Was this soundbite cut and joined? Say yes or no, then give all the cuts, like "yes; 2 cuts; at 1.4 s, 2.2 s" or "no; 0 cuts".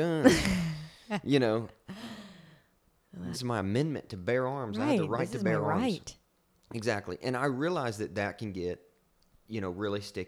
yes; 1 cut; at 3.3 s